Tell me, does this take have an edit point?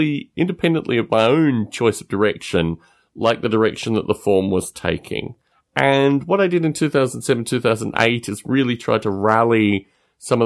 no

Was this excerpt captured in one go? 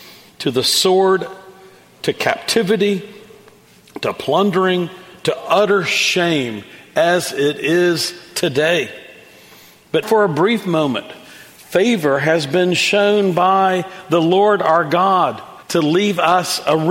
no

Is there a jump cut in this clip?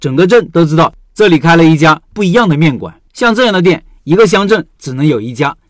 yes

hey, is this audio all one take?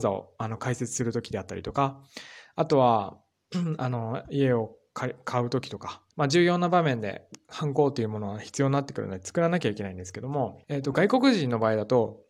no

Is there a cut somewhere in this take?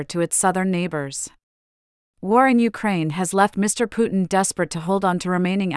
no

